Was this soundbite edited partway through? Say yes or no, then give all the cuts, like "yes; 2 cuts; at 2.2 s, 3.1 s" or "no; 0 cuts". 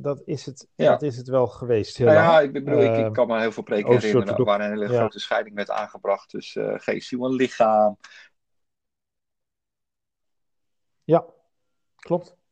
no; 0 cuts